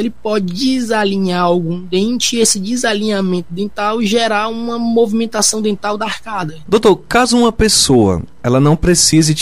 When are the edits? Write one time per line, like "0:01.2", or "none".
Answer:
0:06.6